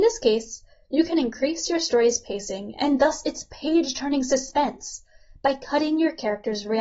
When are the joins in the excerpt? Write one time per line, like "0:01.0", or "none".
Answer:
none